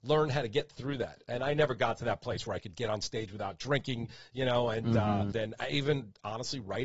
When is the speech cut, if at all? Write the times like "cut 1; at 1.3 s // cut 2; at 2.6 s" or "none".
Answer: cut 1; at 5.3 s

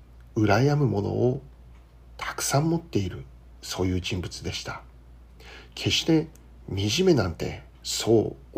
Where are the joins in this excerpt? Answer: none

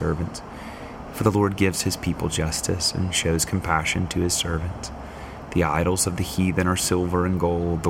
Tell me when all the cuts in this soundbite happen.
cut 1; at 1.1 s

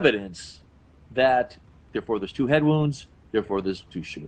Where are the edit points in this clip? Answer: cut 1; at 1.9 s

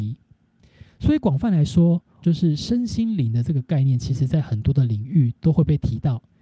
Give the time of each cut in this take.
cut 1; at 2.2 s

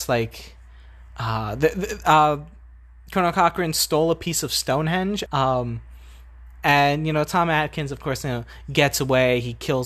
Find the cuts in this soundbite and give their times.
cut 1; at 5.3 s

